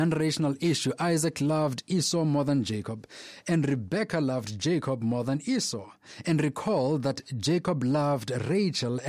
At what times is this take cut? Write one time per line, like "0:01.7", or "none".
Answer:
none